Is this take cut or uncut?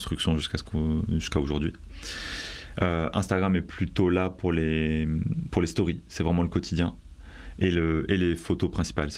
uncut